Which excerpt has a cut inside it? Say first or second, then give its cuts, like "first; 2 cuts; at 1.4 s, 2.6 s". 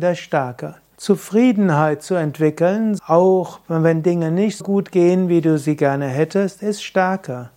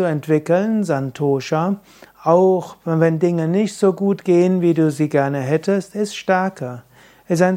first; 3 cuts; at 1.0 s, 3.0 s, 4.6 s